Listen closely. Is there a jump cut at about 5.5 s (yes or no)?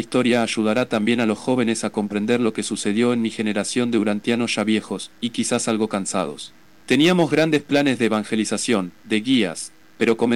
no